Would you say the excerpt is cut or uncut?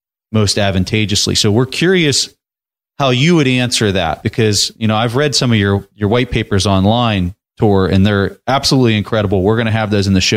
uncut